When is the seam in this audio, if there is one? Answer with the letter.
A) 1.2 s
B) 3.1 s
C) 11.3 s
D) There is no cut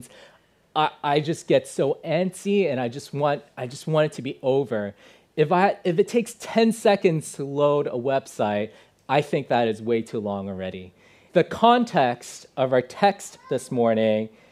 C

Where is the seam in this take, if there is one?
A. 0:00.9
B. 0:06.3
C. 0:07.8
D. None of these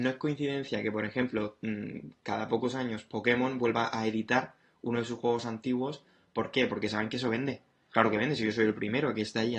D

